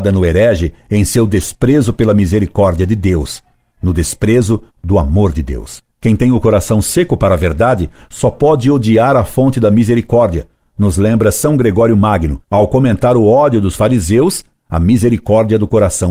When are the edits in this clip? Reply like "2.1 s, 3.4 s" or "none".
5.9 s, 12.4 s